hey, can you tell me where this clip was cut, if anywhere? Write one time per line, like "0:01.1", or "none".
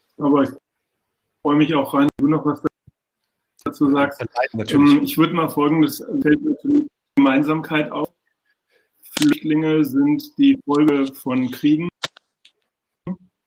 none